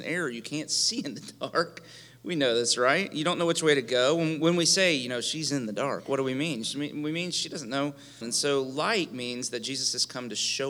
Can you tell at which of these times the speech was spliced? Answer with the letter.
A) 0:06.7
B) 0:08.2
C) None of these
B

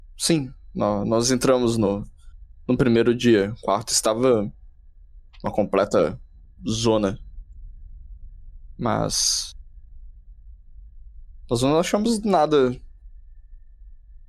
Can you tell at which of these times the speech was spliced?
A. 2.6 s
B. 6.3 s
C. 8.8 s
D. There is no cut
D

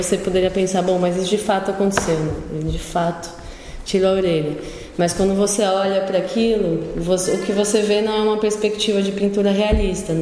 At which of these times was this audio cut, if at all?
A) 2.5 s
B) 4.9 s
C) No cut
C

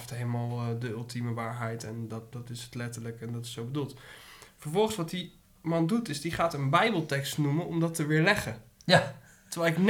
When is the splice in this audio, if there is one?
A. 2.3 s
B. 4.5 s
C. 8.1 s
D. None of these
A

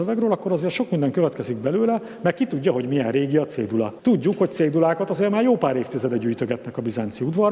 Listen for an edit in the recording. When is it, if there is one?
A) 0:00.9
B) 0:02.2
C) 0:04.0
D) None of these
D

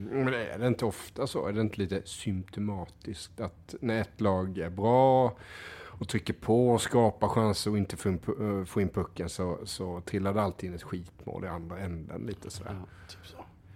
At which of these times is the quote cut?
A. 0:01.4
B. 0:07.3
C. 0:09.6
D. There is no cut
C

